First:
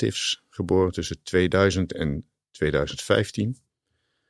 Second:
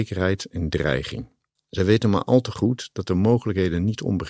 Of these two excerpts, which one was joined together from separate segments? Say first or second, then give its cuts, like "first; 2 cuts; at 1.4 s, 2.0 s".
second; 1 cut; at 1.6 s